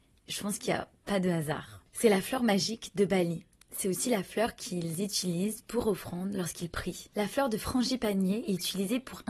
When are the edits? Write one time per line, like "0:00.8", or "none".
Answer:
none